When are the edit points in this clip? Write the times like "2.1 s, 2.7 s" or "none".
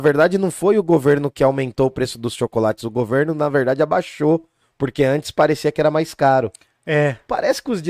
none